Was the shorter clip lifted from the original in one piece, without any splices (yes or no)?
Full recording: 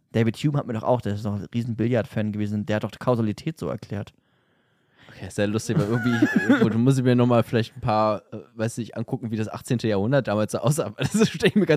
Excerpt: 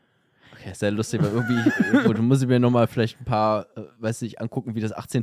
yes